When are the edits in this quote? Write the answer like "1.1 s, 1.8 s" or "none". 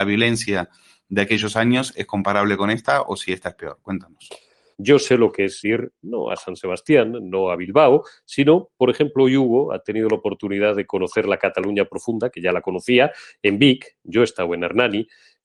4.7 s